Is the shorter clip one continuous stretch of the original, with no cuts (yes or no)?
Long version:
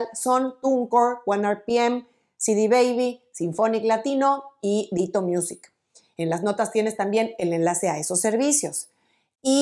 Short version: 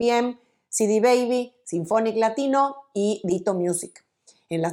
yes